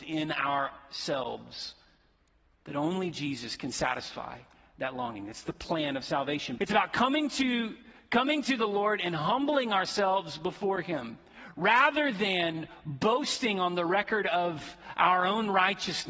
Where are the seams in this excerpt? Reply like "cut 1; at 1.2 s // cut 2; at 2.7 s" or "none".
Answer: cut 1; at 6.6 s

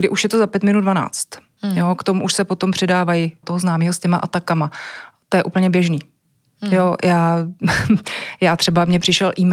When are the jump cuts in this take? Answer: cut 1; at 3.4 s

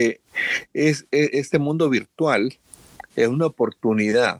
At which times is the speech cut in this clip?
cut 1; at 1.3 s

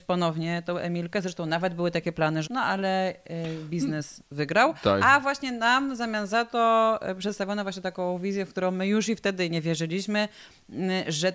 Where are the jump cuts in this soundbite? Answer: cut 1; at 2.4 s

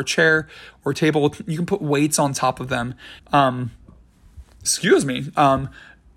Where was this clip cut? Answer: cut 1; at 3.2 s

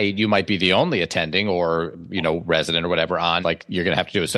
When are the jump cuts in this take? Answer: cut 1; at 3.4 s

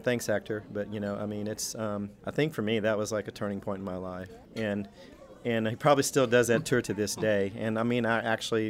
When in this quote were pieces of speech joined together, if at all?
cut 1; at 2.2 s // cut 2; at 4.4 s

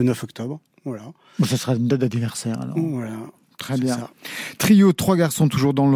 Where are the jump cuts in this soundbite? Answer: none

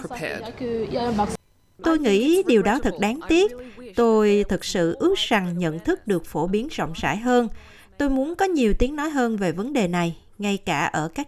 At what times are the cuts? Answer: cut 1; at 1.8 s

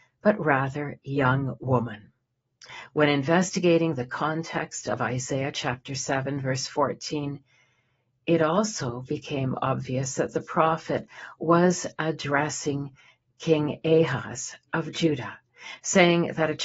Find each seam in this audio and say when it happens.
none

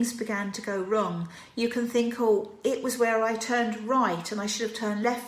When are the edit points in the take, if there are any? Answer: none

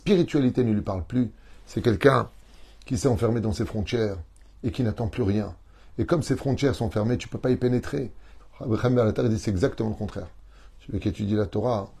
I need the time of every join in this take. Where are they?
cut 1; at 8.4 s // cut 2; at 10.7 s

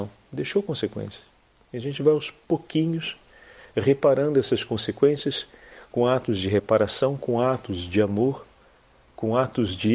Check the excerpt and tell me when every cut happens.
none

